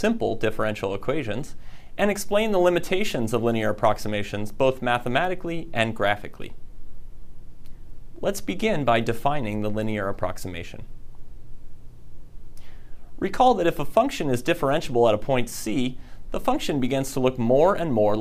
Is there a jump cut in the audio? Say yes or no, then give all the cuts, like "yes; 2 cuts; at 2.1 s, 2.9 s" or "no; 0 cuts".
yes; 1 cut; at 16.3 s